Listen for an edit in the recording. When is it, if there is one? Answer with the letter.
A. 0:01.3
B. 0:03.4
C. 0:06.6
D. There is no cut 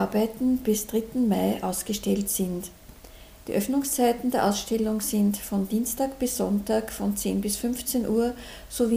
D